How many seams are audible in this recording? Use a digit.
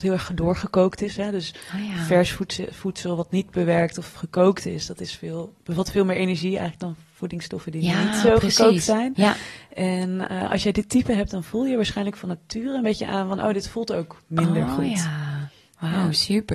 0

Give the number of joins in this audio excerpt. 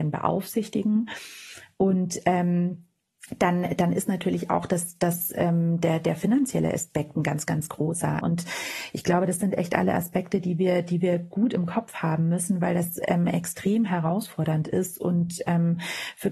1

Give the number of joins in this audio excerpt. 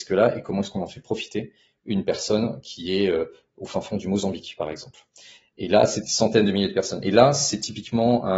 0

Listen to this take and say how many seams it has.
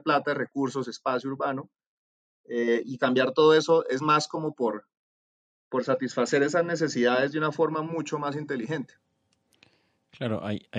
0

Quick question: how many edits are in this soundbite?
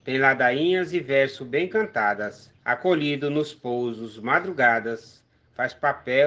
1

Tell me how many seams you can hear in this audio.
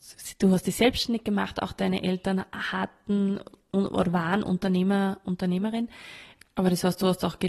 1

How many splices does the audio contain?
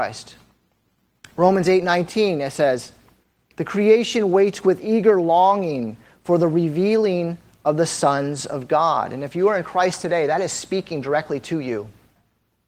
0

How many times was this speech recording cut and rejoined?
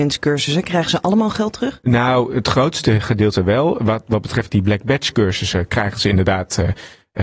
0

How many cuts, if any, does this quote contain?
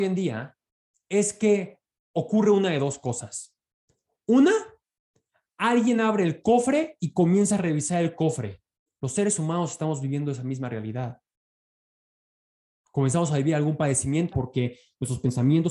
2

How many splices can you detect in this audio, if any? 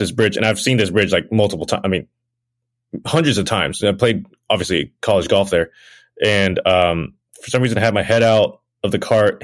0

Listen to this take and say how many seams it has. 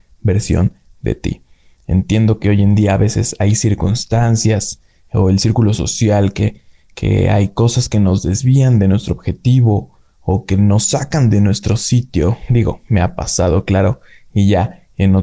0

